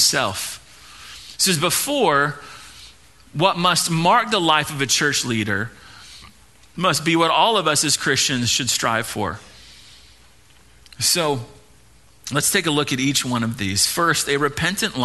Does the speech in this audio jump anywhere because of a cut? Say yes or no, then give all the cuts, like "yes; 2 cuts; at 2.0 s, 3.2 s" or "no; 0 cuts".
no; 0 cuts